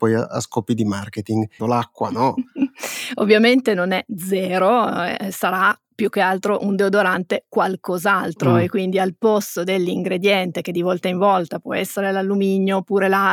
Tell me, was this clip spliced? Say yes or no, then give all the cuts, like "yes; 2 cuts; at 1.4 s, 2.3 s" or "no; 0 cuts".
yes; 1 cut; at 1.6 s